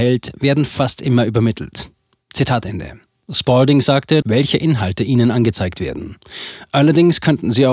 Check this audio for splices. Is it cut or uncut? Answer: cut